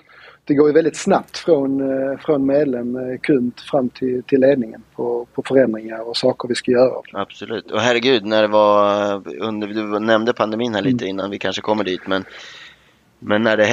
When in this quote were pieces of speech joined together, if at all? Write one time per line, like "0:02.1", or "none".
0:07.0